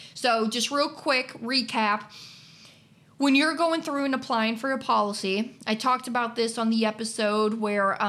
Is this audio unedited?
yes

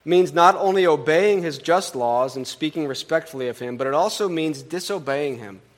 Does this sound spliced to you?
no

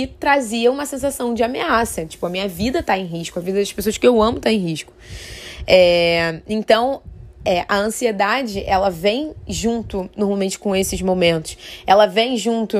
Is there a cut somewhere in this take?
no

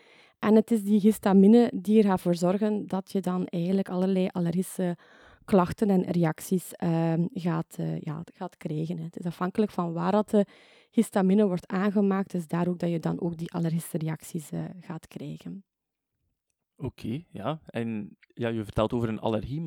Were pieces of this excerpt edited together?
no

